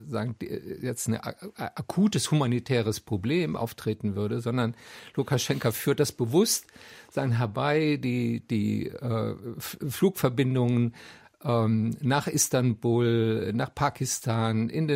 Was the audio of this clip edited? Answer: no; 0 cuts

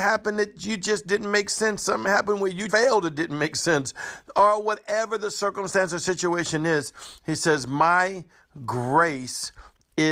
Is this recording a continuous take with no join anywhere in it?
no; 1 cut; at 2.7 s

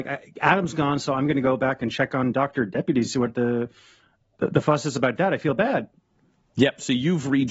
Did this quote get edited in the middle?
no; 0 cuts

